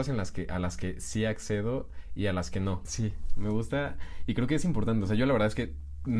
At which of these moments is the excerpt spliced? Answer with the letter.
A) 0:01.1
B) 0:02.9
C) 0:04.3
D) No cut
B